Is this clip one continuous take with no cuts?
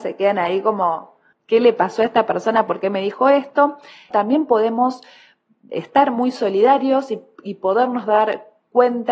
no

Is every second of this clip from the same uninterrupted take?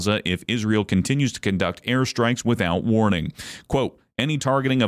yes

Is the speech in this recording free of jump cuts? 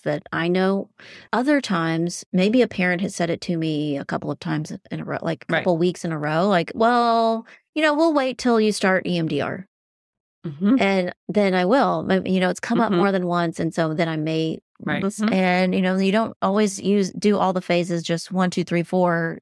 no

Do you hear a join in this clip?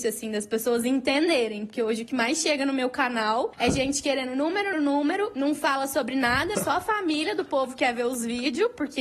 yes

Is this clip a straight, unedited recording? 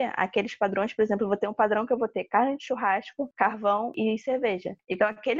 yes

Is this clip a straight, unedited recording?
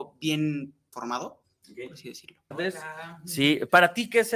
no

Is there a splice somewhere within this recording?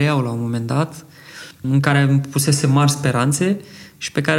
yes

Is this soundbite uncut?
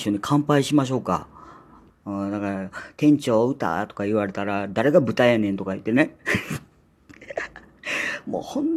no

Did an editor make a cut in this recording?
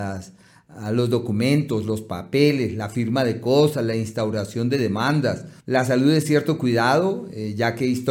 yes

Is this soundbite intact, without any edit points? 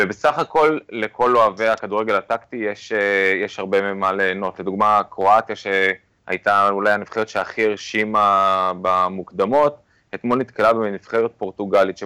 yes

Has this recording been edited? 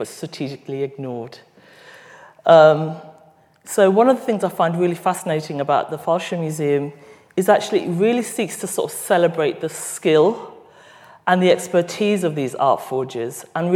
no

